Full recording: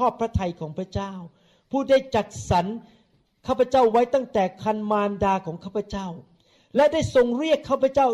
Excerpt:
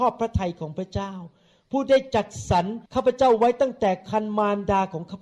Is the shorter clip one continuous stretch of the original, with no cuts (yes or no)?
no